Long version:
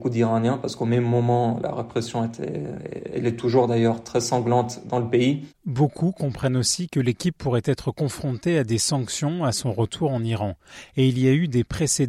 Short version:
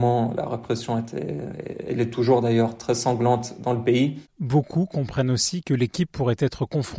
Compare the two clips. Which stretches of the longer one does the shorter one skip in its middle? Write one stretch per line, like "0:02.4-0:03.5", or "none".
none